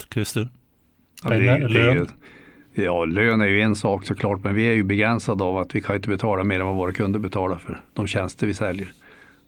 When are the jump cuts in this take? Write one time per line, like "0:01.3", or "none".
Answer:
none